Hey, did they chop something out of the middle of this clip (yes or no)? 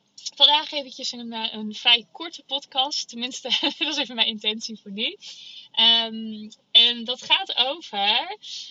yes